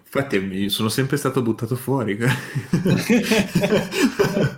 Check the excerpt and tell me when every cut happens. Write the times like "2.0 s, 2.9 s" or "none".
none